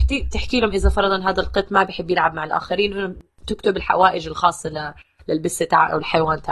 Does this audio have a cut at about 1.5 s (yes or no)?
no